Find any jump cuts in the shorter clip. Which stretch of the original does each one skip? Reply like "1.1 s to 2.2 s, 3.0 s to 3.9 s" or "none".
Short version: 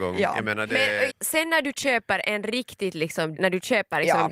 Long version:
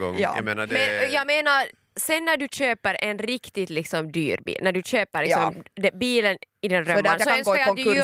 1.1 s to 1.8 s, 4.1 s to 4.6 s